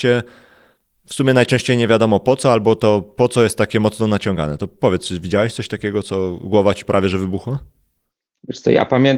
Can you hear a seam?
no; 0 cuts

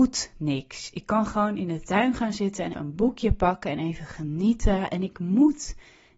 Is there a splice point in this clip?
yes; 1 cut; at 2.7 s

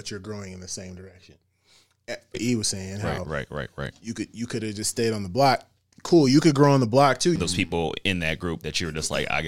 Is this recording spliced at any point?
yes; 2 cuts; at 2.3 s, 7.4 s

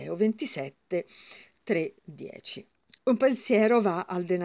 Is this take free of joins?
no; 1 cut; at 3.0 s

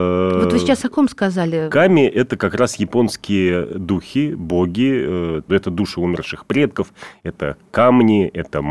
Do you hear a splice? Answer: yes; 1 cut; at 5.5 s

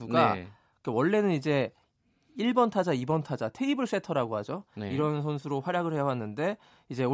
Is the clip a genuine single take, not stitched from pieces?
yes; 0 cuts

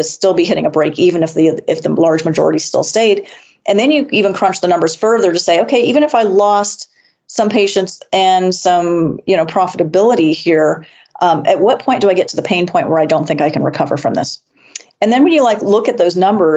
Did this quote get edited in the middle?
no; 0 cuts

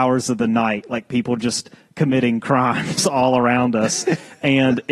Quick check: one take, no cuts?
yes; 0 cuts

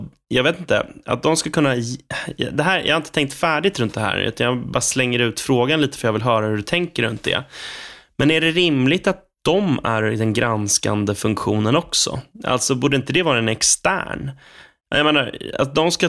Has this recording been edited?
no; 0 cuts

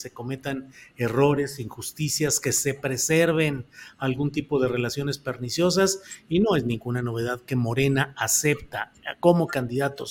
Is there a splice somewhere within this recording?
no; 0 cuts

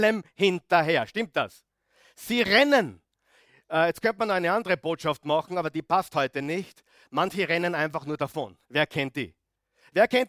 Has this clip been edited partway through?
yes; 1 cut; at 8.6 s

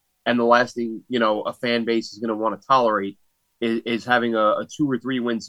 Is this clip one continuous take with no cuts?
yes; 0 cuts

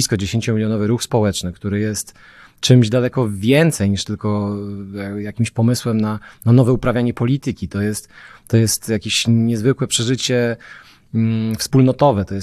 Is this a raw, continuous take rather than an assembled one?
yes; 0 cuts

